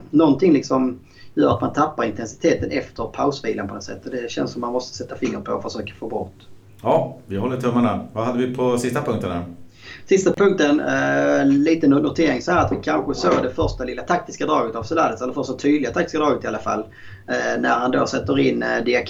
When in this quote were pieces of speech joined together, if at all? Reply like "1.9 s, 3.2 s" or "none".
none